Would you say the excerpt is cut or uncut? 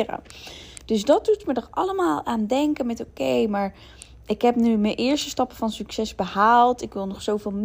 uncut